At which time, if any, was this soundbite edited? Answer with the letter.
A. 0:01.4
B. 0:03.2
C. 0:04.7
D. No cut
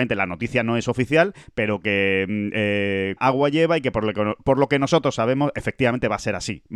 B